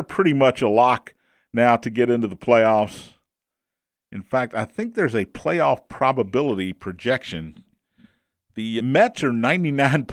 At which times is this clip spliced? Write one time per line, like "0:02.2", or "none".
0:08.8